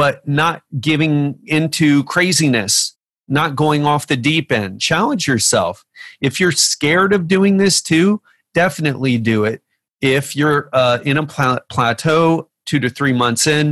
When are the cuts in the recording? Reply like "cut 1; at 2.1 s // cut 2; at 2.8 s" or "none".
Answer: cut 1; at 4.8 s